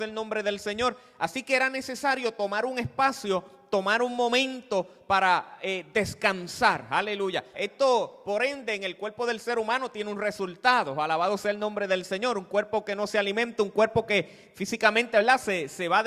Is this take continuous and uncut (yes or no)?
no